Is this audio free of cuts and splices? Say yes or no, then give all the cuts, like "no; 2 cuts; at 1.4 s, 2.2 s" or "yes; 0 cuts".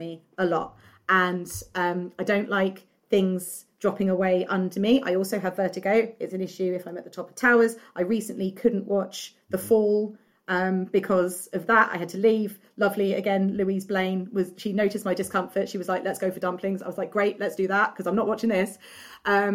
yes; 0 cuts